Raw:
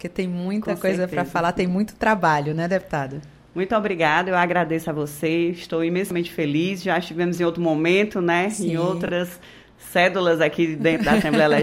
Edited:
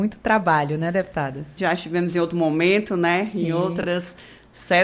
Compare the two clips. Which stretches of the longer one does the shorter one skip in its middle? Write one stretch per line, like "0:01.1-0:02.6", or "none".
0:03.3-0:06.8